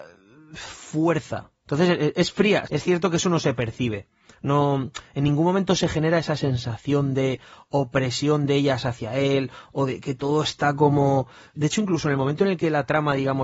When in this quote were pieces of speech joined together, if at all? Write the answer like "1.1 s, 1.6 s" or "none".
2.7 s, 11.5 s